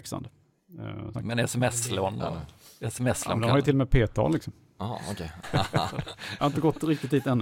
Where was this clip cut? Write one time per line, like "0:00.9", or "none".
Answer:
0:01.1
0:05.4